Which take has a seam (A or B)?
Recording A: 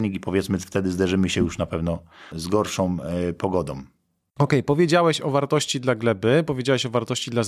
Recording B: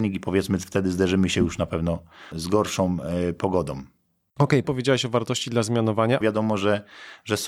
B